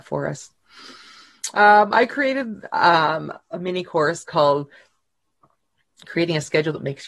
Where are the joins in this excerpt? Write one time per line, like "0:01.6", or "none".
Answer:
0:03.4